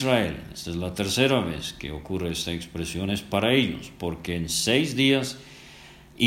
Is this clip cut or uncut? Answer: uncut